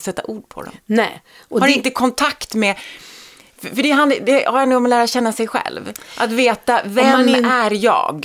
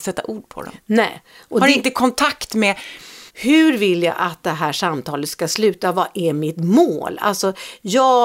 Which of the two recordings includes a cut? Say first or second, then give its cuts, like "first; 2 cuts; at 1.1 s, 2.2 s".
second; 1 cut; at 3.3 s